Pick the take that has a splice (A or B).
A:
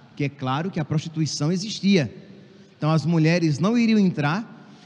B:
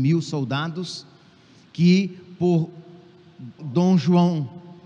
B